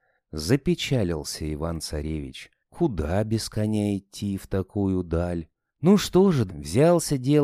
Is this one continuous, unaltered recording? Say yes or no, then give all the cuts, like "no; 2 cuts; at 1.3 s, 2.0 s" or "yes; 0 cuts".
no; 1 cut; at 6.5 s